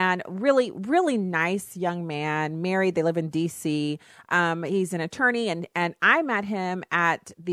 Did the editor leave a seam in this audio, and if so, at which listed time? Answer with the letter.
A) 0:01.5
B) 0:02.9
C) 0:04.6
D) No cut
D